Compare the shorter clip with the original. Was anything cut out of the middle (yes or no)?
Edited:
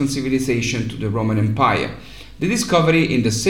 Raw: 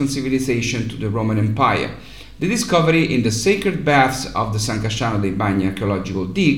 no